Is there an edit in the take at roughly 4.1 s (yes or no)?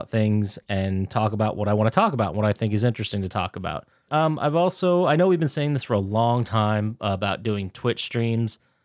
yes